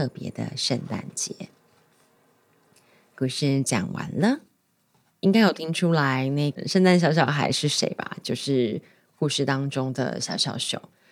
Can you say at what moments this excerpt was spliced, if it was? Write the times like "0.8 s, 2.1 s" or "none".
5.1 s

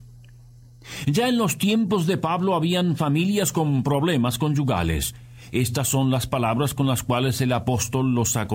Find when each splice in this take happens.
none

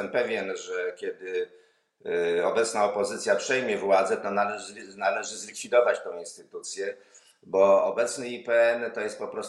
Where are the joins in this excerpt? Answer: none

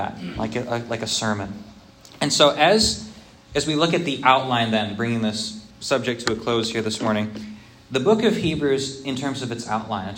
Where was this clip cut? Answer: 5.7 s

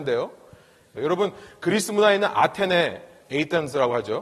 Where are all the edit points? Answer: 1.0 s, 3.2 s

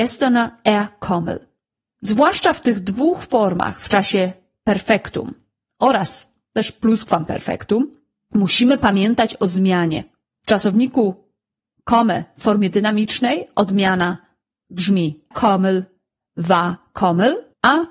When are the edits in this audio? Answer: 15.3 s

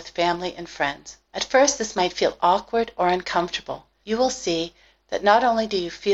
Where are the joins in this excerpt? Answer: 1.2 s, 4.0 s

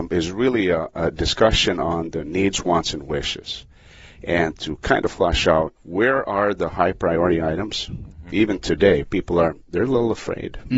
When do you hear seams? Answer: 5.8 s, 8.3 s

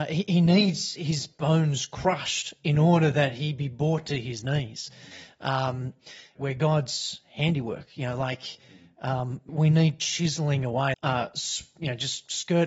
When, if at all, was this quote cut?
6.4 s, 9.5 s, 10.9 s

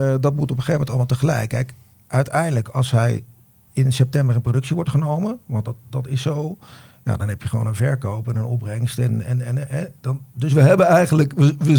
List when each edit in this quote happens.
none

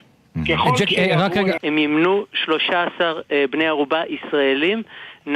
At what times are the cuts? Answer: 1.6 s

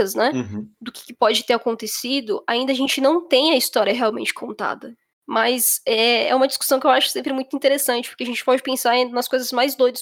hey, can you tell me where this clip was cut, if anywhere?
5.1 s

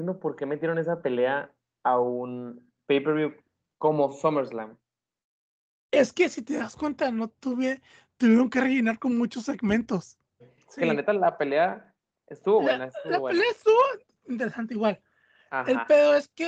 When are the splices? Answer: 10.4 s

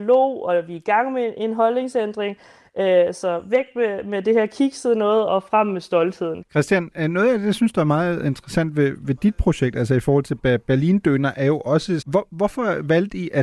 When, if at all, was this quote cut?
5.3 s, 6.4 s, 12.0 s

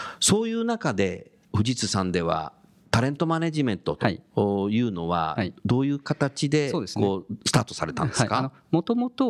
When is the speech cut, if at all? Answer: none

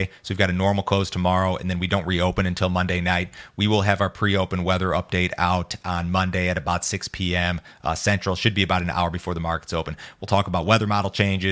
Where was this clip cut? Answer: none

